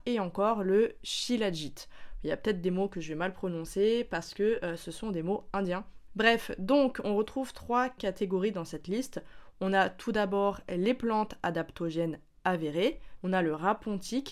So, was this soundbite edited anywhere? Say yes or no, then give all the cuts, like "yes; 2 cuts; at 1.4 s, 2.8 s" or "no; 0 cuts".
yes; 2 cuts; at 6.1 s, 13.2 s